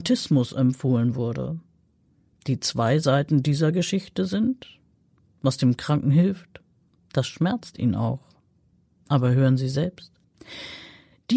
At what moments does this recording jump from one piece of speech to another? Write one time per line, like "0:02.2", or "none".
none